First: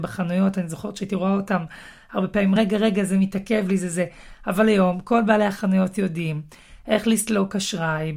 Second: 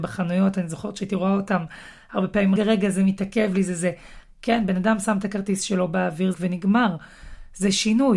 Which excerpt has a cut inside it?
second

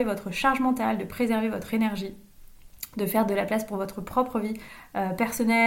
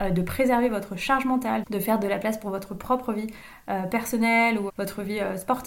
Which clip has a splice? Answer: second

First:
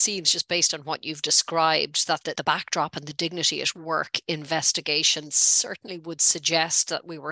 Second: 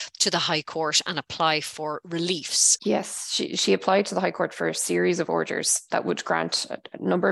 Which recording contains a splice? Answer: second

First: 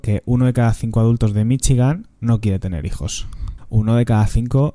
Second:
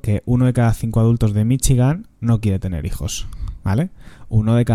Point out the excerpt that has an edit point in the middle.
first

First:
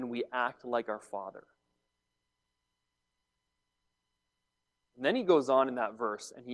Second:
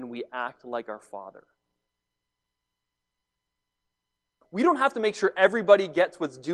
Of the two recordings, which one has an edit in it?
second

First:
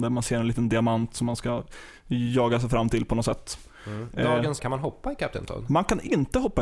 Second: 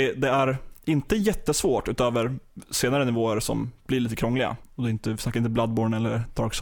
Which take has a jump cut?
first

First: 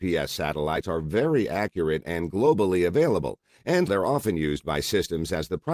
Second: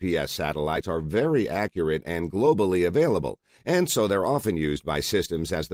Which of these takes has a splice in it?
first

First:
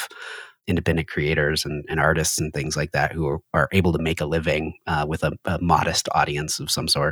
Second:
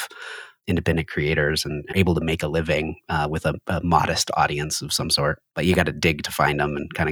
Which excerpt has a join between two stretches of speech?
second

